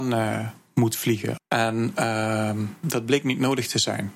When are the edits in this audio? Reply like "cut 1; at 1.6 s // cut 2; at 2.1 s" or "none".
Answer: cut 1; at 1.4 s